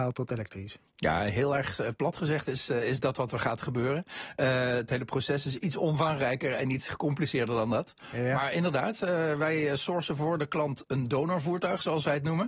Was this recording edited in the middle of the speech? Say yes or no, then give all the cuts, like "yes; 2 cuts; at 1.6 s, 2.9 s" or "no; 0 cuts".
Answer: no; 0 cuts